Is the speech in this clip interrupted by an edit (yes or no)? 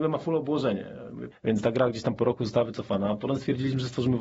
yes